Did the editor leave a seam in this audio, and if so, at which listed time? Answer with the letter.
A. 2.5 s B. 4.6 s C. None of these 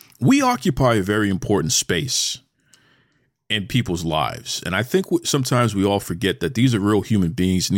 C